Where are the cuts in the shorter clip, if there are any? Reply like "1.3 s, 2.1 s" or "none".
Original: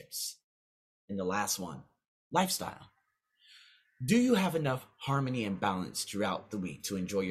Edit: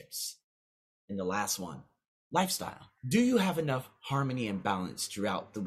3.0 s